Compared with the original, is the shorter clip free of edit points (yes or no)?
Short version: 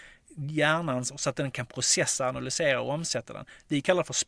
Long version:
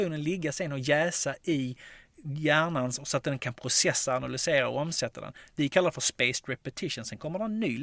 yes